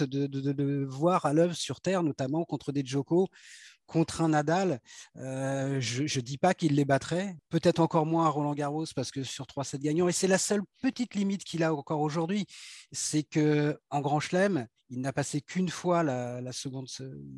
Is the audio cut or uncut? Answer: cut